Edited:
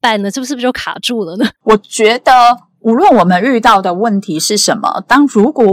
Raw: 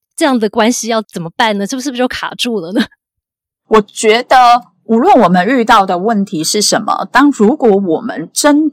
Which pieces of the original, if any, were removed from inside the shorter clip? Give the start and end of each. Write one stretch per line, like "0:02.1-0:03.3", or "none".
0:02.9-0:03.6